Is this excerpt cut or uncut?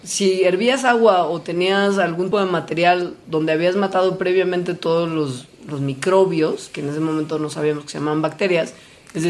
cut